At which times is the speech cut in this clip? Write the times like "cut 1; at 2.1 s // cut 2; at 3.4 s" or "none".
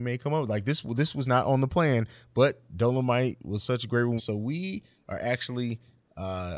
cut 1; at 4.2 s

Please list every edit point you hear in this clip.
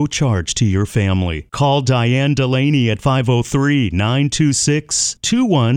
none

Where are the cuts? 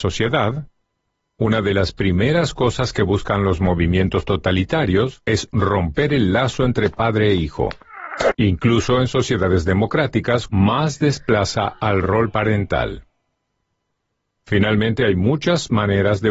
cut 1; at 1.2 s // cut 2; at 8.3 s // cut 3; at 10.5 s

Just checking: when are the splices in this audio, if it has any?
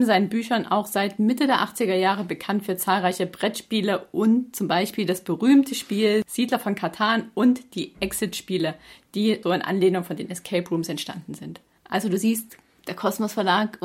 cut 1; at 9.4 s

